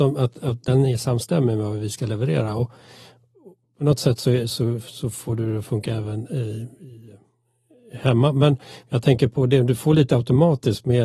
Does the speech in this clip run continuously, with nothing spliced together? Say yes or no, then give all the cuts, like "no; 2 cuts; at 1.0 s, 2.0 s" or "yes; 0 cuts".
yes; 0 cuts